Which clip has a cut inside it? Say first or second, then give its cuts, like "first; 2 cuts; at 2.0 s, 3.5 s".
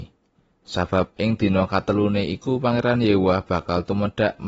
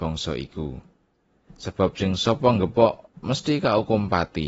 second; 1 cut; at 1.4 s